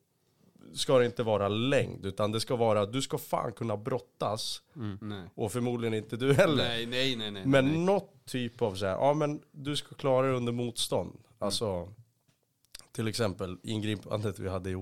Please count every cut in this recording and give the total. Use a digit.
1